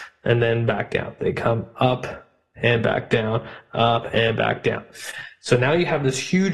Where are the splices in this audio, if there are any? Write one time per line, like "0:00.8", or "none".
none